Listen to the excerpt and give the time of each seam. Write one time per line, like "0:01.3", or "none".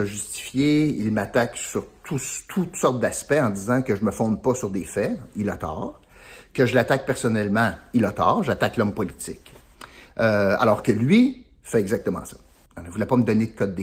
0:12.7